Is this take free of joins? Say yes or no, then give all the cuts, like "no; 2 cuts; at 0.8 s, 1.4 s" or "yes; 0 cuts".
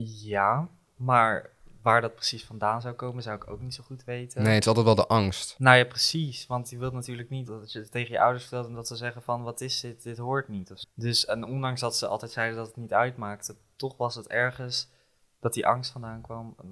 no; 2 cuts; at 7.5 s, 10.8 s